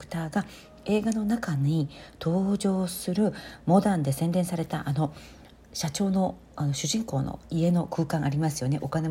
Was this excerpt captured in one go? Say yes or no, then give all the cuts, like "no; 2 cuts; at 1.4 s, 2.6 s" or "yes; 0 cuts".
yes; 0 cuts